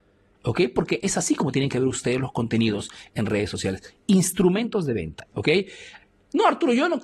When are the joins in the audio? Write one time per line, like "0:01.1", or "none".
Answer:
0:05.3

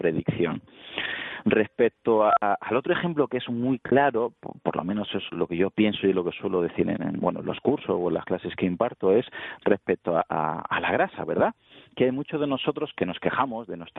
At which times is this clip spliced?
0:05.3

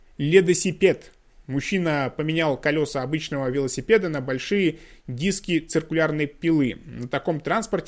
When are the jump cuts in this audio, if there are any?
none

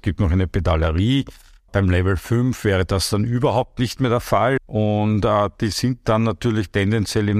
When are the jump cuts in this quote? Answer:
0:01.7
0:04.6

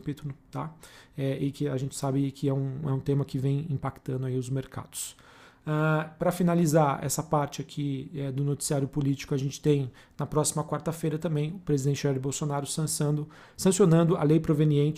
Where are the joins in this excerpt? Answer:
none

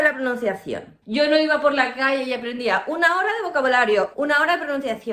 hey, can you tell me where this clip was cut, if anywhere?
0:01.0
0:04.1

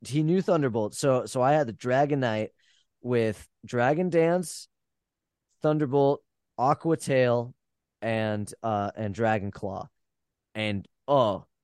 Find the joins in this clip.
none

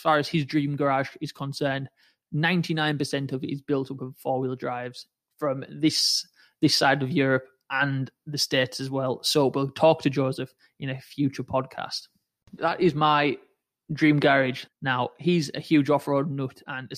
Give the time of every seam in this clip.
0:12.6
0:14.7

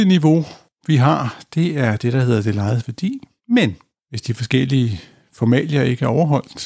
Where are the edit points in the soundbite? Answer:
0:03.4

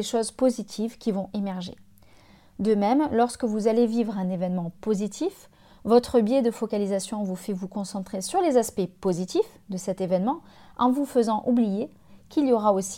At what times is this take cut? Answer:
none

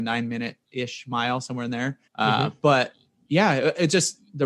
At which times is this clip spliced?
0:02.1

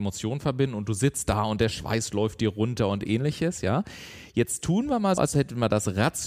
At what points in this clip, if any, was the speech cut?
0:05.2

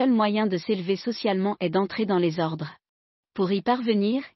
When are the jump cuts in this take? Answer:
0:03.2

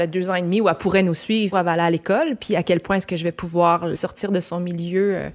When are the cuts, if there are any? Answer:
0:01.5
0:03.9

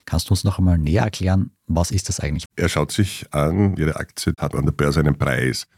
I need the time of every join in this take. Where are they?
0:02.5
0:03.8

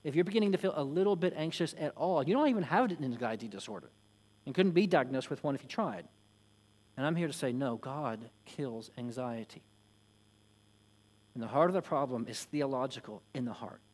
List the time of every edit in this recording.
0:06.9

